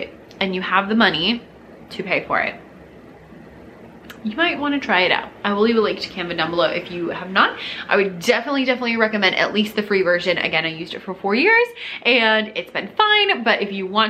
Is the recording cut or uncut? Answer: uncut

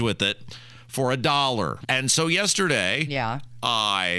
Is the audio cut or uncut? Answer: cut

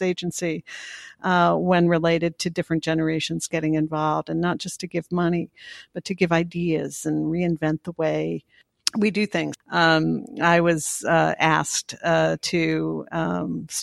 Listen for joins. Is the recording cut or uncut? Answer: uncut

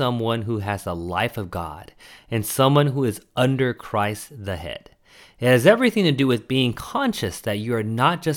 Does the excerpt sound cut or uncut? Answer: uncut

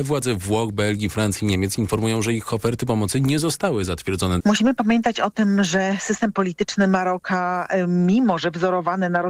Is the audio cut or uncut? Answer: cut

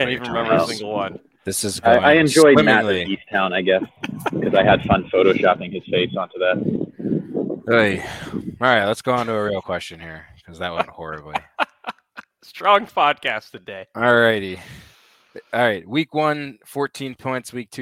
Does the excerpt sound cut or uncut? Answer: uncut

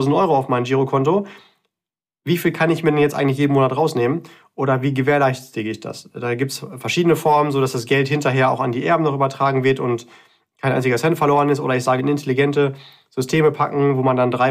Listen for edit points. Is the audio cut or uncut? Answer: cut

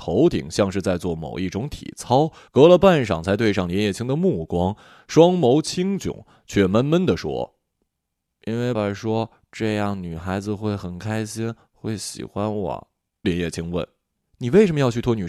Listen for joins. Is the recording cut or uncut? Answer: cut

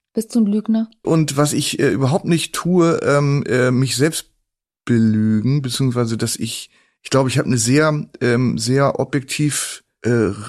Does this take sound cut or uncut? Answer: cut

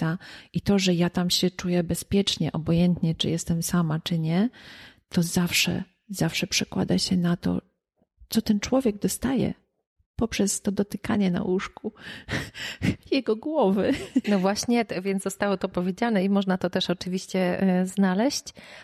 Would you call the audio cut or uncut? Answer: cut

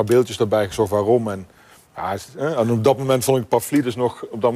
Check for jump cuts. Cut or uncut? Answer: uncut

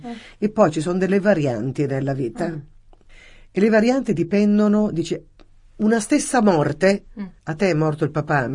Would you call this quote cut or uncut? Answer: uncut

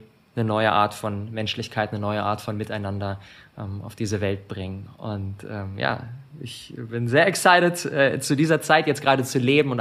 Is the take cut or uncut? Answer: uncut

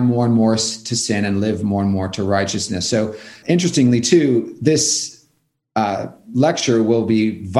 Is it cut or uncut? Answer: cut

